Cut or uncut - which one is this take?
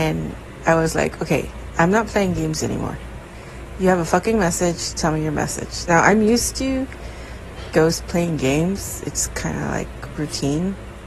uncut